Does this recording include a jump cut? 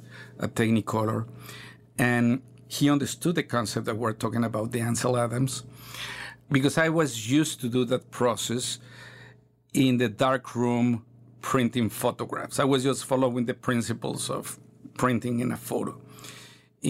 no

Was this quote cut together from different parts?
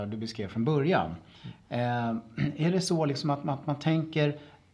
no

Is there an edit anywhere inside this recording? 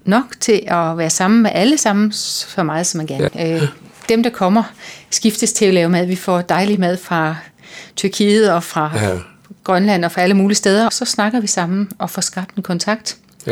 yes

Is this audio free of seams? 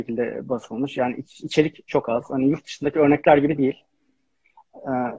yes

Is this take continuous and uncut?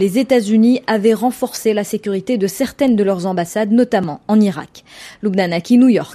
yes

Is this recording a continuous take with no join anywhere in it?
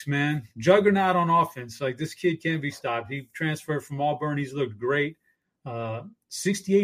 yes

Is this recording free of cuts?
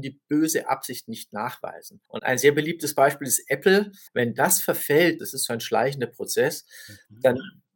no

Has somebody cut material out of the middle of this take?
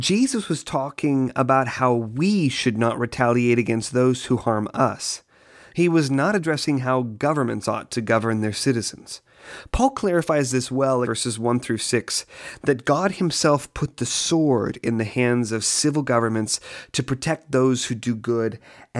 yes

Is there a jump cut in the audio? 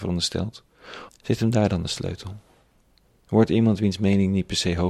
yes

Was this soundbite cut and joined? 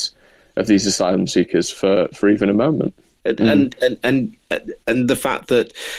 yes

